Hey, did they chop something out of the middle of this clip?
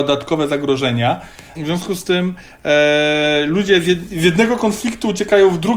yes; 1 cut; at 1.6 s

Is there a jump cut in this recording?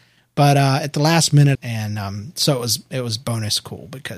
yes; 1 cut; at 1.5 s

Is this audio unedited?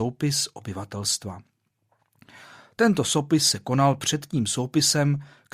yes; 0 cuts

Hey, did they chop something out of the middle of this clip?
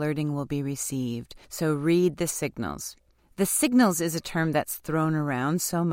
no; 0 cuts

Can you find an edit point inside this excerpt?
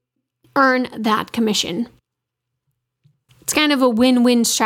no; 0 cuts

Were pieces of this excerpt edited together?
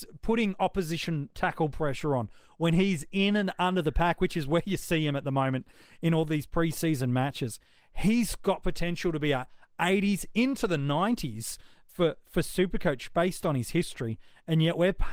no; 0 cuts

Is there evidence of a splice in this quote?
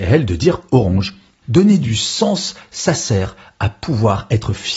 yes; 1 cut; at 1.4 s

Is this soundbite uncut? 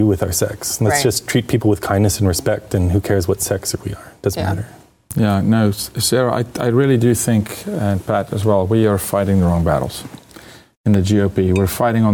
yes; 0 cuts

